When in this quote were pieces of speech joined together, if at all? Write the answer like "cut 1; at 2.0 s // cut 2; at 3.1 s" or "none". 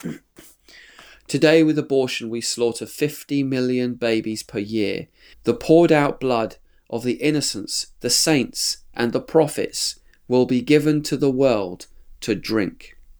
cut 1; at 5.3 s